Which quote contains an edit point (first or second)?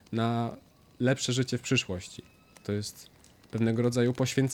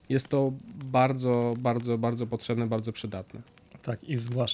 first